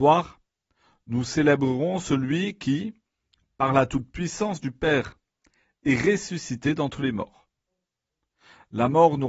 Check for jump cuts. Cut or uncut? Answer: uncut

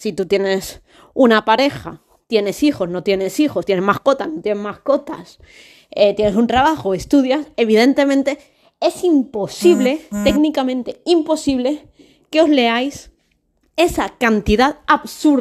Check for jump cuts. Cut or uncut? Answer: uncut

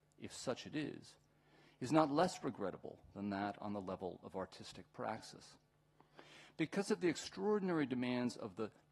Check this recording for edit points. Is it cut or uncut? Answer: uncut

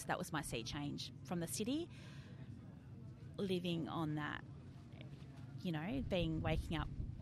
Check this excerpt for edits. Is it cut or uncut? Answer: uncut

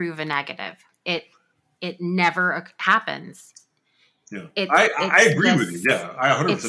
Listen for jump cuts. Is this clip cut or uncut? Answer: uncut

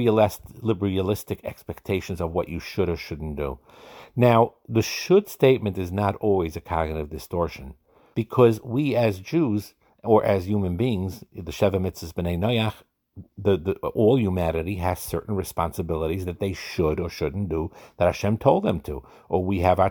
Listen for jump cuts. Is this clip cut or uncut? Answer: cut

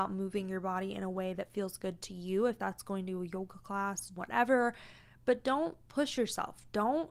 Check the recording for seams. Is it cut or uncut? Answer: cut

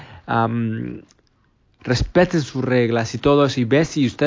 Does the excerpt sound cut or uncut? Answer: cut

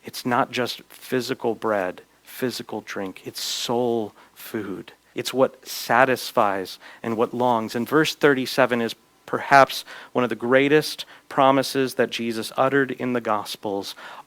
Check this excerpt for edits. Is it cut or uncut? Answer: cut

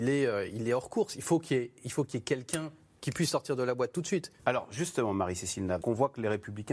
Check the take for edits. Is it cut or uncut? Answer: cut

